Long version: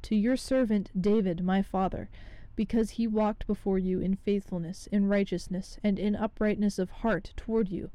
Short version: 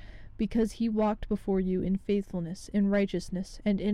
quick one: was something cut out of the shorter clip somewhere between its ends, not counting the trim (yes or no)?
no